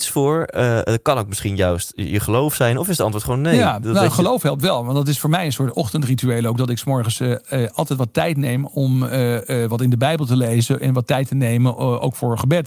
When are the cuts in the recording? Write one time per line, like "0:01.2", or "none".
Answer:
none